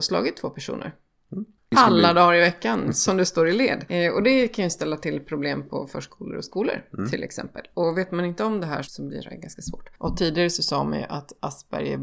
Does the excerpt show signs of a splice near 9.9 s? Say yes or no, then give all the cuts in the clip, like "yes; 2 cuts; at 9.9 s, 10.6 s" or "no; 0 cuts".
yes; 2 cuts; at 8.8 s, 9.9 s